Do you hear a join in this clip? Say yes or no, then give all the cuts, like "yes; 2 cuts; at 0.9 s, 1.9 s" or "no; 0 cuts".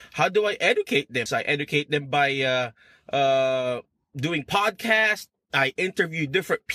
yes; 1 cut; at 1.3 s